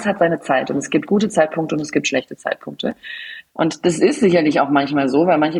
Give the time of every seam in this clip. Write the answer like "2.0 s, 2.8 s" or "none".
3.5 s